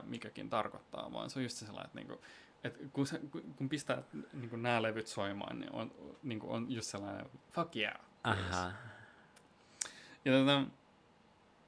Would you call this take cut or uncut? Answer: uncut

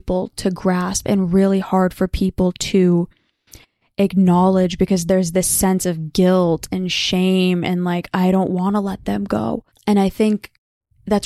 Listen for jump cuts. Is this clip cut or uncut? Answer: cut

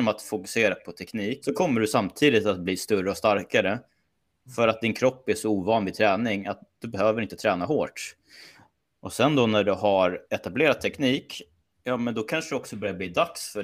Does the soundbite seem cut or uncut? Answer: cut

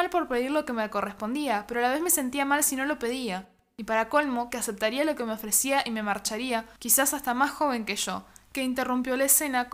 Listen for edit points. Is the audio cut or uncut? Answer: cut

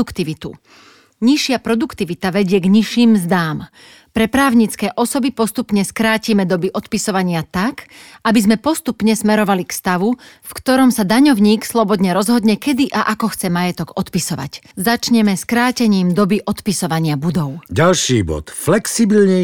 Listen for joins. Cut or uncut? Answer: cut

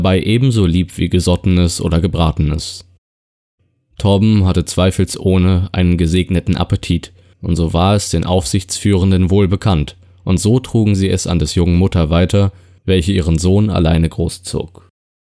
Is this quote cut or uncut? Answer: uncut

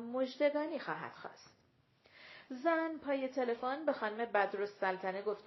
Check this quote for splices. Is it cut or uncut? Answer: uncut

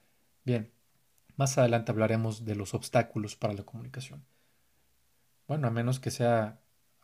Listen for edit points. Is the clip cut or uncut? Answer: cut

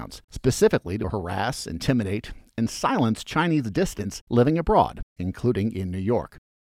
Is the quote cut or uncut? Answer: uncut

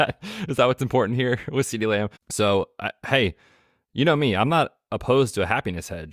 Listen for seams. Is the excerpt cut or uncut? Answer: cut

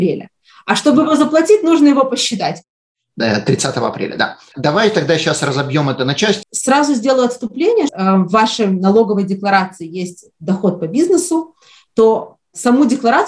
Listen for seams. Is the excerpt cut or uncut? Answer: cut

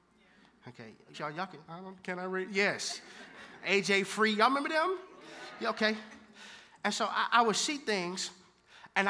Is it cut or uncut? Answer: cut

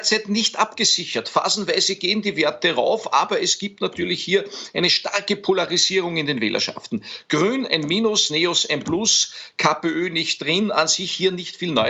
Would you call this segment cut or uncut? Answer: uncut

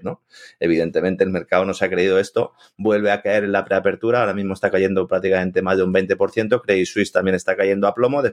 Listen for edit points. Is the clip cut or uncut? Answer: uncut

